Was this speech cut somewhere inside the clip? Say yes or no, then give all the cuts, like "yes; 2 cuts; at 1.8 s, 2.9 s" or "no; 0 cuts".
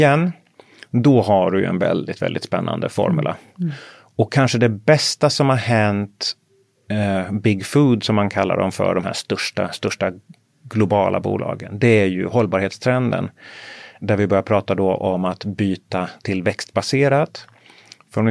no; 0 cuts